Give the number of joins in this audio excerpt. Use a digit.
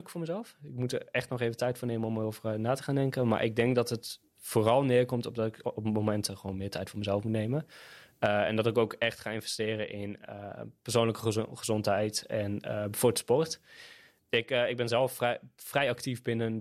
0